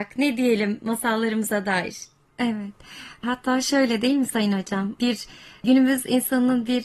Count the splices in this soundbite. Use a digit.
1